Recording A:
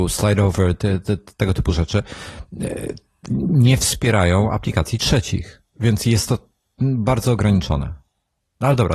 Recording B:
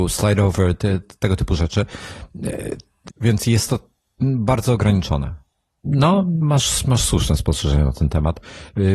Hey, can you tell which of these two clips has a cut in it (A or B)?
B